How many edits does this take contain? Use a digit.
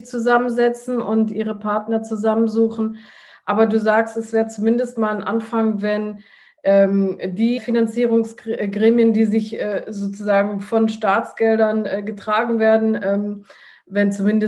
1